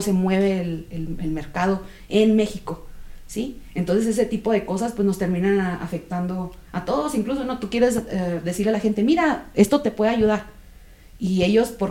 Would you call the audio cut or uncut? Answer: uncut